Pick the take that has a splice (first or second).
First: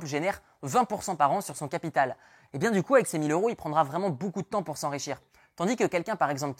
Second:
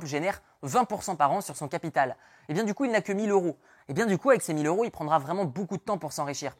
first